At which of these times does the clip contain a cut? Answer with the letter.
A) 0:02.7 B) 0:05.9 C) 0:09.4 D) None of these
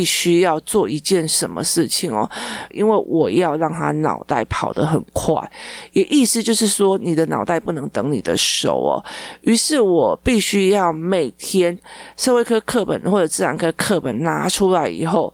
A